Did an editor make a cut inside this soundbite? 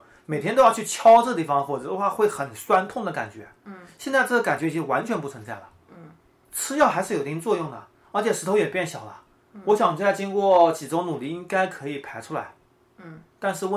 no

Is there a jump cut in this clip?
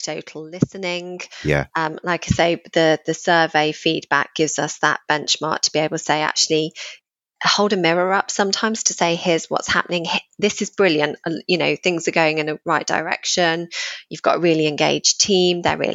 no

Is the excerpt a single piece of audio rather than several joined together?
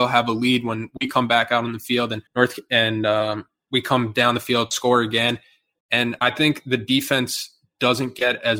no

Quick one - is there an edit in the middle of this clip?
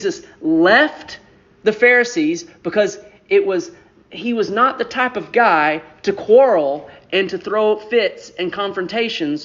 no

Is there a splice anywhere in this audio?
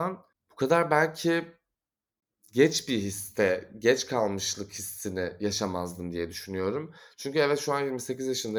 no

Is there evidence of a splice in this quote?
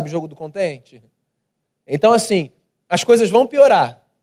yes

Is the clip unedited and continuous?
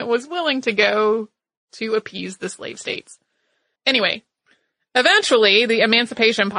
no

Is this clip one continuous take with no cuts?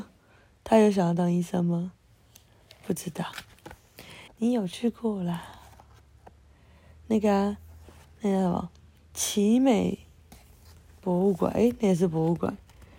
no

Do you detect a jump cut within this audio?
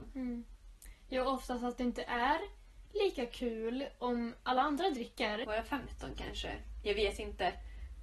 yes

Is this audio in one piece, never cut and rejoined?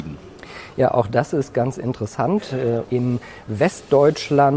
no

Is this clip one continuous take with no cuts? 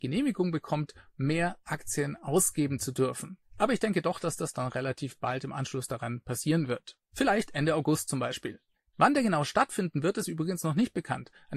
no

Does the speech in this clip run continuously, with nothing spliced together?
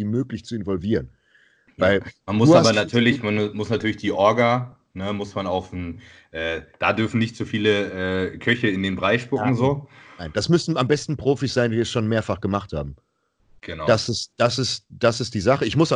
yes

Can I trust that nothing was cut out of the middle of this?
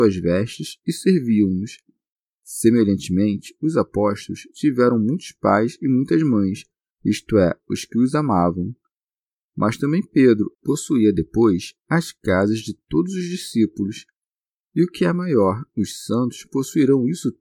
no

